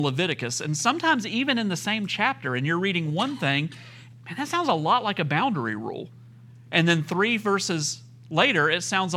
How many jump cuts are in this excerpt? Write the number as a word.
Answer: one